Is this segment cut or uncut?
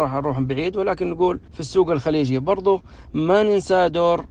cut